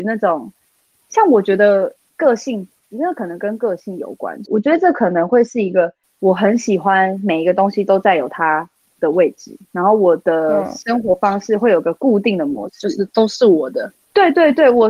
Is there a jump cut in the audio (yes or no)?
yes